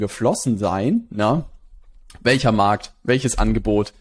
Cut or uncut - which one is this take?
uncut